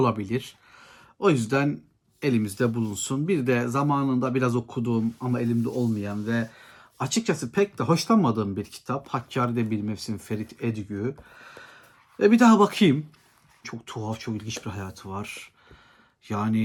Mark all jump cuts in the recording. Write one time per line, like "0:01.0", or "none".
0:13.6